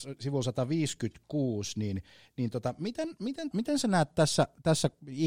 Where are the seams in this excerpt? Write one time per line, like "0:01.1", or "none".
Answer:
0:03.5